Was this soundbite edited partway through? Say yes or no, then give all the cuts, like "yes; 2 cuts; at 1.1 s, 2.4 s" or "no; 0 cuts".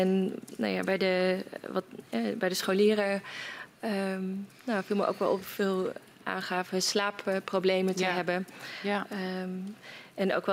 no; 0 cuts